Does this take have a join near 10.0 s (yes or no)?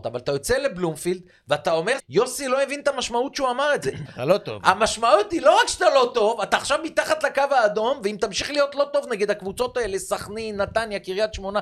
no